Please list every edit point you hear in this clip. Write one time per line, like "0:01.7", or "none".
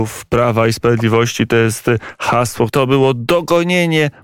0:02.7